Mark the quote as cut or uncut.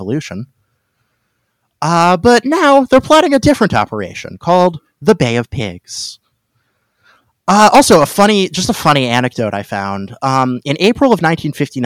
uncut